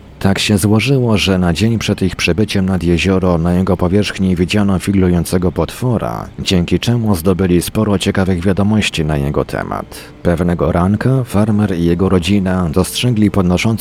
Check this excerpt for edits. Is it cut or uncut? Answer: uncut